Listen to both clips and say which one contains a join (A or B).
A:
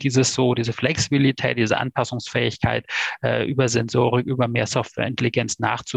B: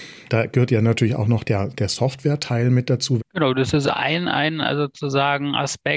B